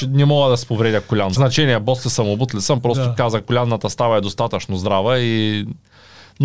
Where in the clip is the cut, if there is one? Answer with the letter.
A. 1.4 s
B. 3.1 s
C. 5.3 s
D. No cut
A